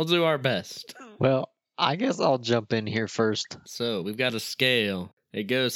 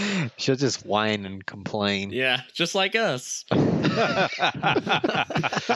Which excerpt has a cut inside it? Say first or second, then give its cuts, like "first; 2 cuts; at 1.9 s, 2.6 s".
first; 1 cut; at 3.6 s